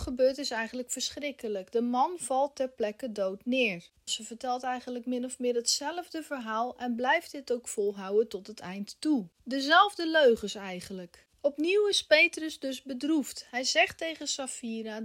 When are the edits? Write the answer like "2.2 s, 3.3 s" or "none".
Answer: 4.1 s